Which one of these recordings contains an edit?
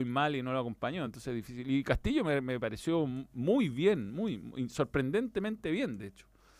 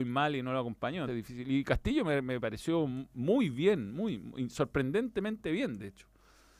second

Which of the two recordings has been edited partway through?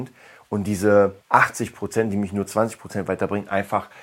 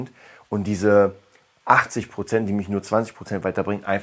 first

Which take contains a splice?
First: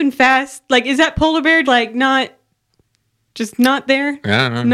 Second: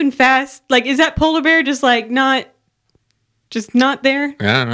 first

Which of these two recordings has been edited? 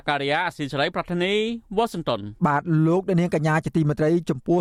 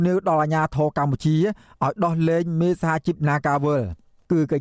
first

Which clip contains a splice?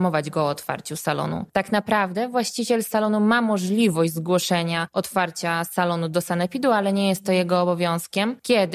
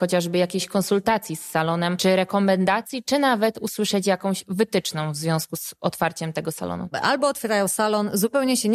second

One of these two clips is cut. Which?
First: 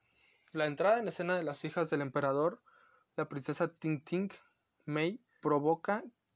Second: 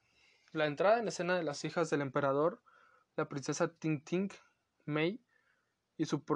first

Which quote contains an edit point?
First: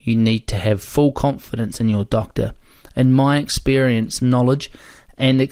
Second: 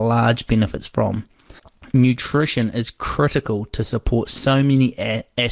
first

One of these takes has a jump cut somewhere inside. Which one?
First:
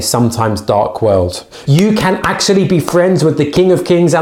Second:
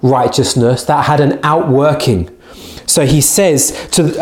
first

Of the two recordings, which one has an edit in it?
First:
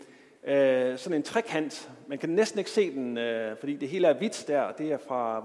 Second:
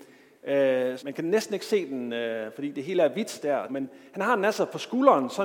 second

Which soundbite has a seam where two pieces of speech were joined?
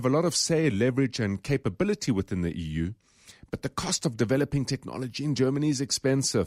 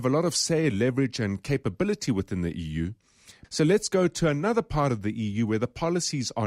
second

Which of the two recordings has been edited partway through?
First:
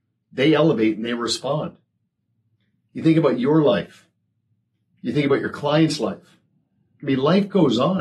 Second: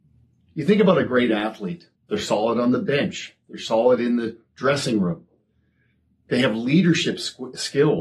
second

